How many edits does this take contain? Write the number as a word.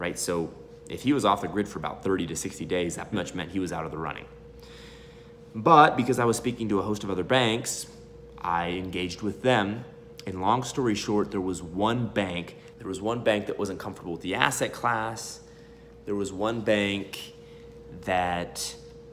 two